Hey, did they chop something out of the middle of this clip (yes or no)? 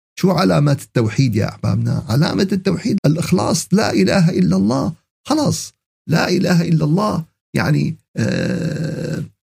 yes